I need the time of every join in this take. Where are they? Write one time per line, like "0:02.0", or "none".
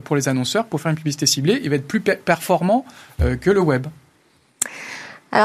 none

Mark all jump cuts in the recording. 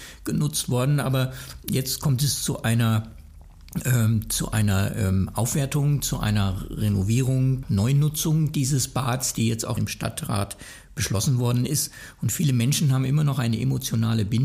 0:07.6
0:09.8

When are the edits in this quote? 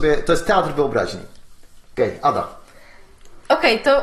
none

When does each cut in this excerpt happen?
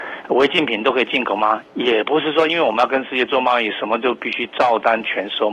none

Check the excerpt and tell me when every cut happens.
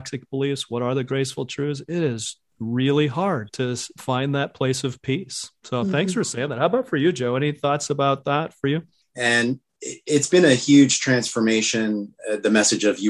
0:09.1

